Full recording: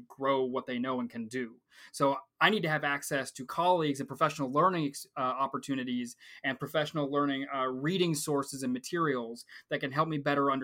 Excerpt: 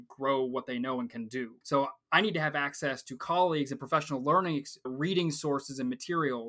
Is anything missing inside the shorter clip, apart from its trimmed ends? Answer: yes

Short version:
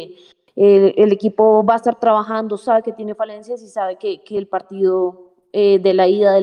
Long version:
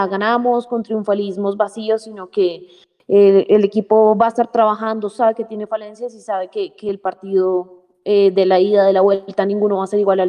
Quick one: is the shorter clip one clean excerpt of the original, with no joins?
yes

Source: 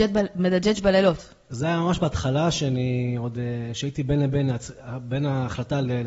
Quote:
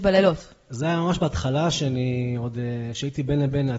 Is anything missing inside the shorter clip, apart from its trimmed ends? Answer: no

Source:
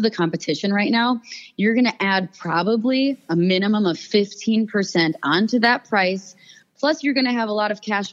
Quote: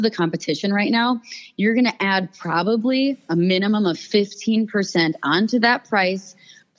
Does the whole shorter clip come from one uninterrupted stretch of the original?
yes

